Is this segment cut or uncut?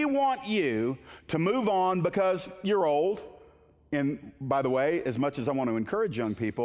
uncut